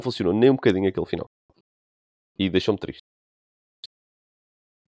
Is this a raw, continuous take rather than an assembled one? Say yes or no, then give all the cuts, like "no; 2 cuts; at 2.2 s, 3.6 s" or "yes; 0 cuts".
yes; 0 cuts